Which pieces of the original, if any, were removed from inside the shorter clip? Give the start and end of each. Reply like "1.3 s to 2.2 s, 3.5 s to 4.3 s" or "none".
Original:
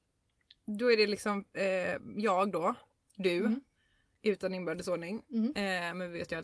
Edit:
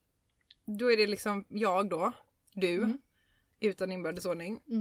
1.5 s to 2.1 s